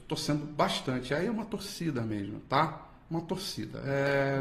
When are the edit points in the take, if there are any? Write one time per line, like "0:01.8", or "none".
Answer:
none